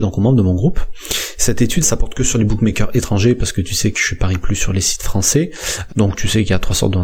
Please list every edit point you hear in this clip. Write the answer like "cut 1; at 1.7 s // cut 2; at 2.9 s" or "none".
cut 1; at 1.8 s // cut 2; at 5.9 s